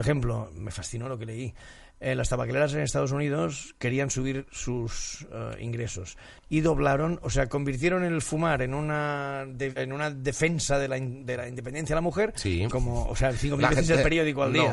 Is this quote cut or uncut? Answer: cut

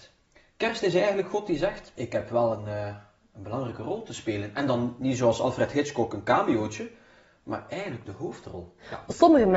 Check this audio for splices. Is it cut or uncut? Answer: uncut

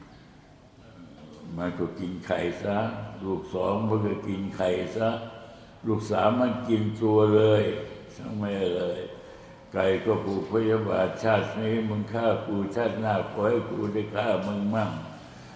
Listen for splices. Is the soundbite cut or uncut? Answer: uncut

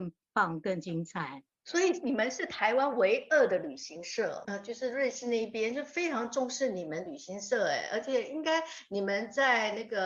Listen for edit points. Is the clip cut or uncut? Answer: cut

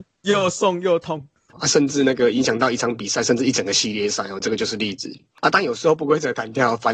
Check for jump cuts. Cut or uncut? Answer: cut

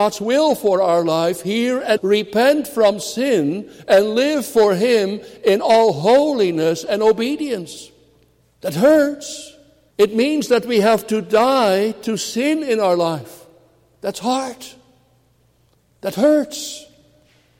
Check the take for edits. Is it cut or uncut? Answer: cut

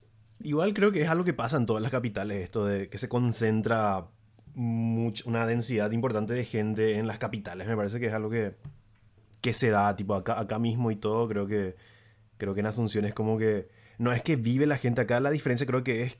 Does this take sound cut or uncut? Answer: uncut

